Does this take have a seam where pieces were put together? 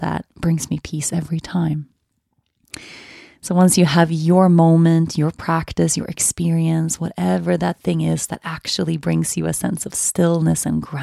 no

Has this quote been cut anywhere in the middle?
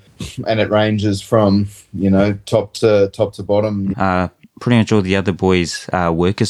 yes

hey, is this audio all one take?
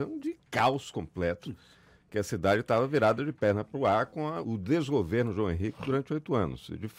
no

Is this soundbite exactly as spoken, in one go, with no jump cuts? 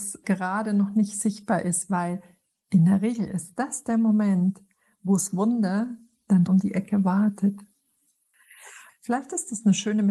no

